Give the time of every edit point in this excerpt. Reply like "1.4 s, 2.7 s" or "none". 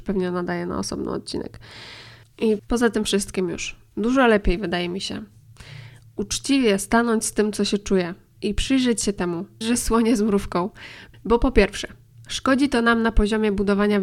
9.6 s

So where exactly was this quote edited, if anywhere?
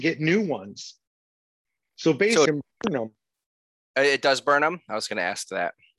2.5 s

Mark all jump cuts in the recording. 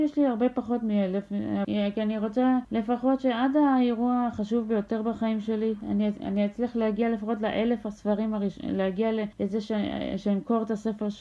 1.6 s

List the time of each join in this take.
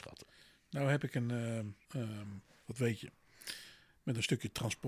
1.9 s

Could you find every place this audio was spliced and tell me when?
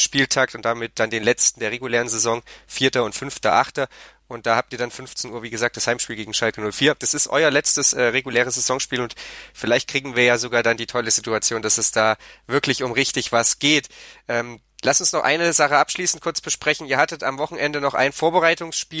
7.0 s

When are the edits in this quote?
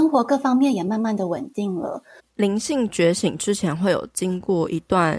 2.2 s

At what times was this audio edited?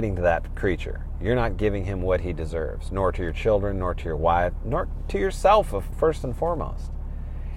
5.9 s

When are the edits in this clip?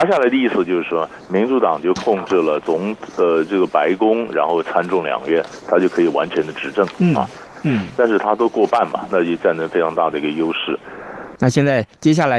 7.6 s, 11.3 s

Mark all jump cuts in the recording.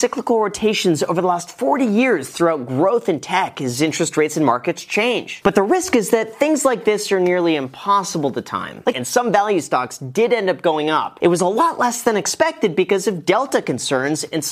8.9 s

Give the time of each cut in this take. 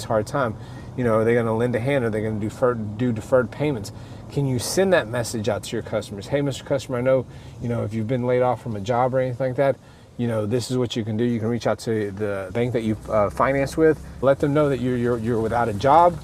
12.5 s, 14.2 s

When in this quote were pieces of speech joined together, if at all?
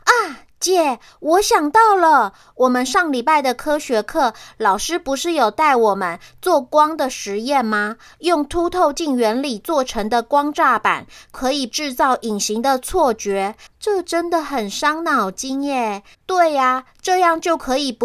13.7 s, 16.1 s

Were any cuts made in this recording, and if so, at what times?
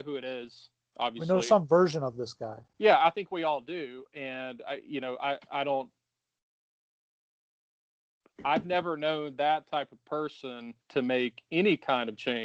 10.8 s

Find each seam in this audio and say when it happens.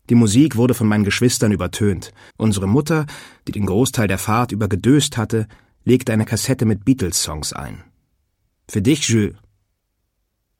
2.3 s, 8.5 s

